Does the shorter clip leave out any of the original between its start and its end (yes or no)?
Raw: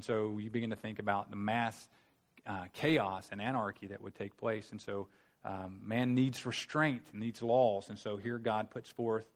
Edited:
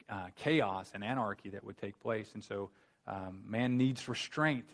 no